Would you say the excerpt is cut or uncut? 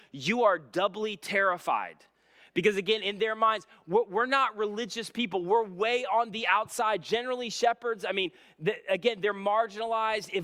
uncut